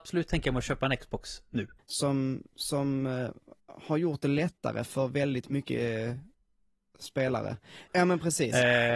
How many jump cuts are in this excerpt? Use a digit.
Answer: 2